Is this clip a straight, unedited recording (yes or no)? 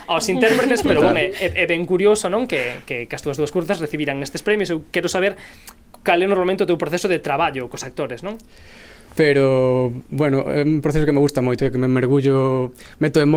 no